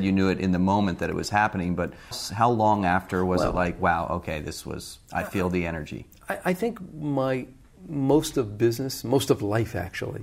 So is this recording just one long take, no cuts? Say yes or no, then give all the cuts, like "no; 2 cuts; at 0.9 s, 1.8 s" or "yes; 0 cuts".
no; 1 cut; at 2.1 s